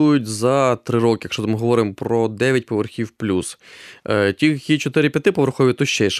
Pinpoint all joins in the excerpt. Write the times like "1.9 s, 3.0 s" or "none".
none